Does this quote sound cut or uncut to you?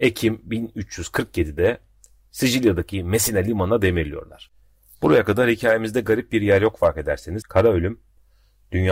cut